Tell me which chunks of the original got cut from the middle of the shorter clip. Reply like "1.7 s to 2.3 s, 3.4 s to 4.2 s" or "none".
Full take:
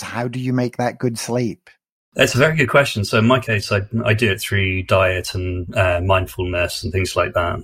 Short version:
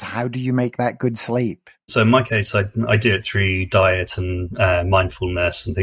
1.9 s to 3.1 s